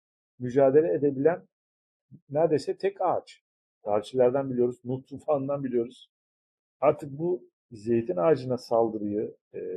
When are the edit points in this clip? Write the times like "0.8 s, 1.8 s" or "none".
3.7 s